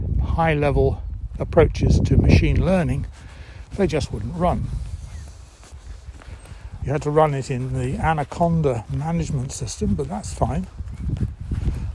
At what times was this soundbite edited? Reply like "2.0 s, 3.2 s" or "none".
6.8 s